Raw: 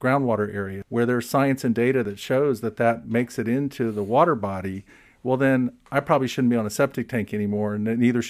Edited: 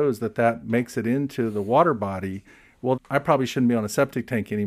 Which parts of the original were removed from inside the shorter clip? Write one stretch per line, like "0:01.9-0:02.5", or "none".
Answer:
0:05.4-0:05.8